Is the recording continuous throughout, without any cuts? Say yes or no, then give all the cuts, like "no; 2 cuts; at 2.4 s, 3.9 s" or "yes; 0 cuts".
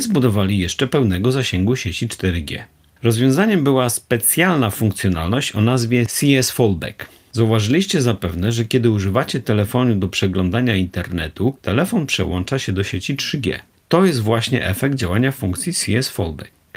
no; 1 cut; at 11.6 s